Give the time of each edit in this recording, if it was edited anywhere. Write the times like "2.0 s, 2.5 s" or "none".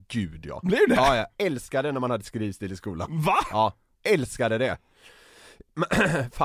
none